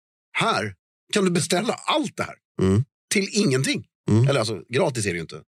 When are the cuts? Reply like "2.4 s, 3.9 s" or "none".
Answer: none